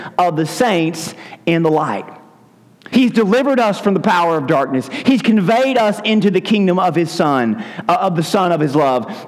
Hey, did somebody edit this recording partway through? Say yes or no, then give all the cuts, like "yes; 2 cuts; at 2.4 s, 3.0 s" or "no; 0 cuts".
no; 0 cuts